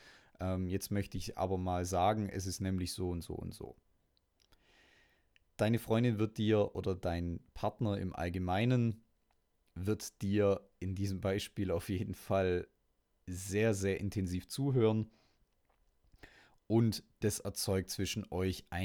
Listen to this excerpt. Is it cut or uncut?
uncut